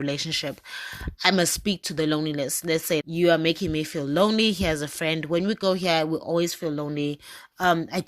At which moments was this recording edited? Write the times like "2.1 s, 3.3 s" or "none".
3.0 s